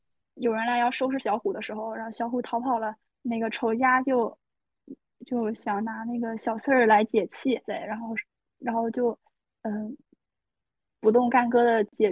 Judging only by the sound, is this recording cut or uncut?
cut